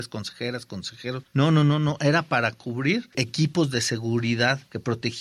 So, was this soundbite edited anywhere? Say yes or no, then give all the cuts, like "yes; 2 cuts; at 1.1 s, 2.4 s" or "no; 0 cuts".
no; 0 cuts